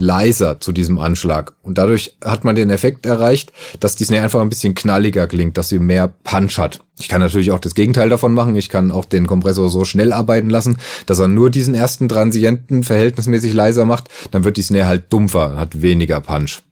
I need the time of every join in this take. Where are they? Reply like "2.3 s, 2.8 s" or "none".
6.9 s